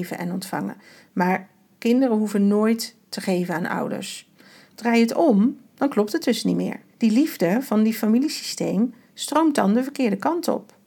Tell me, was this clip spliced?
yes; 2 cuts; at 4.7 s, 6.9 s

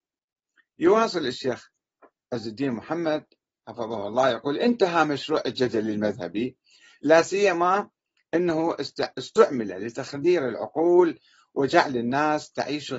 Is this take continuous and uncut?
no; 1 cut; at 9.1 s

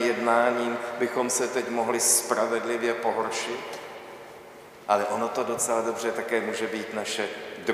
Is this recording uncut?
yes; 0 cuts

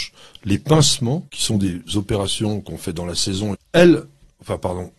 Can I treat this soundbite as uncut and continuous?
no; 2 cuts; at 1.3 s, 3.5 s

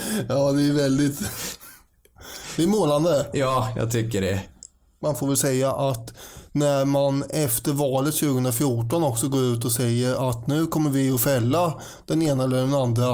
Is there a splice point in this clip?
no; 0 cuts

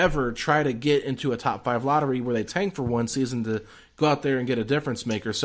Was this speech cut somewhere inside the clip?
no; 0 cuts

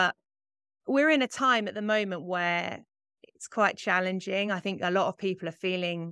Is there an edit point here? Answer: no; 0 cuts

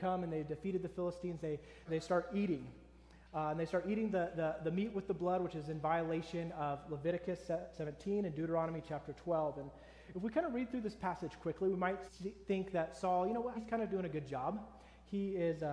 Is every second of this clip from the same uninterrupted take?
no; 3 cuts; at 1.9 s, 12.1 s, 13.5 s

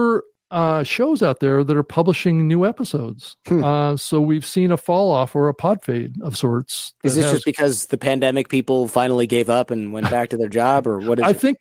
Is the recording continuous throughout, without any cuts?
yes; 0 cuts

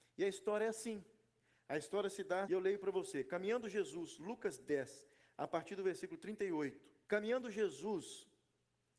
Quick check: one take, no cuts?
no; 2 cuts; at 2.4 s, 7.0 s

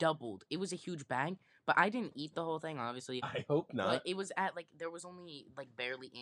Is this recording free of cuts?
yes; 0 cuts

